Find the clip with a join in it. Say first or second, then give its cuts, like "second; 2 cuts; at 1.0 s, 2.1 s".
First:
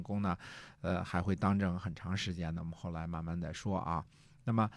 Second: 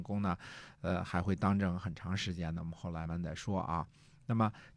second; 1 cut; at 3.0 s